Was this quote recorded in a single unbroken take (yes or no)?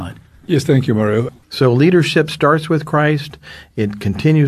no